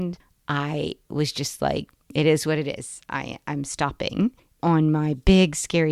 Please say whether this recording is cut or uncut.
uncut